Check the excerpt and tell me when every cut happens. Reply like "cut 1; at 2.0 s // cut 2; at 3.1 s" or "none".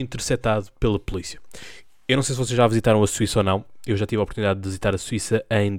none